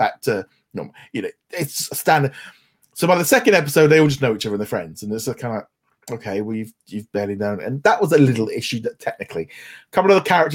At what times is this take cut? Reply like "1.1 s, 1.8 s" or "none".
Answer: none